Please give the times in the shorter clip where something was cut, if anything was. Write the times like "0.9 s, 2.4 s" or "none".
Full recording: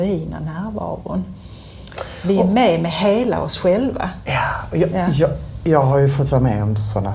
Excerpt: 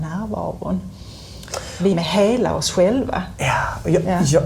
1.9 s